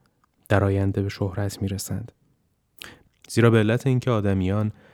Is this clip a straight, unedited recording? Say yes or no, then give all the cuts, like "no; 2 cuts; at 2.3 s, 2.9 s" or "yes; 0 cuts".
no; 1 cut; at 3.1 s